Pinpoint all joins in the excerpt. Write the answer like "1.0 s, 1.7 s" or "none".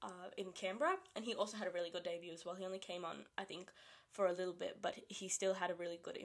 none